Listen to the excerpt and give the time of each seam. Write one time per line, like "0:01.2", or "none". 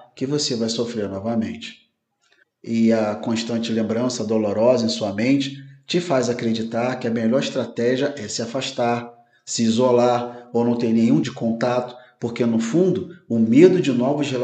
0:02.4
0:11.2